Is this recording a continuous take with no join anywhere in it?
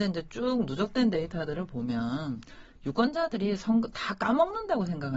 yes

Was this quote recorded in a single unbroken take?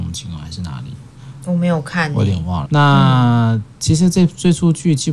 no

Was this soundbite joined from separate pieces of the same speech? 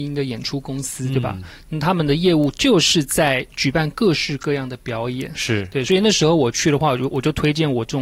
no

